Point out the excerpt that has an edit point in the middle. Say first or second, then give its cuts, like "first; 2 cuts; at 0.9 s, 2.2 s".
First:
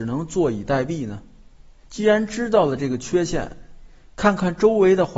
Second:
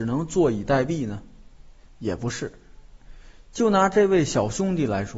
first; 1 cut; at 1.9 s